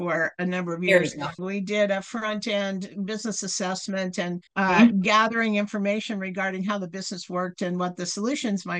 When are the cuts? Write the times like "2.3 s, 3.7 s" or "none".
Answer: 1.4 s, 4.5 s